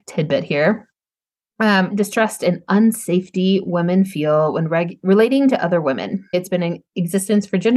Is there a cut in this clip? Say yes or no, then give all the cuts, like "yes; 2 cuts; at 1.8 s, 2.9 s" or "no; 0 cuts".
yes; 2 cuts; at 1.9 s, 6.3 s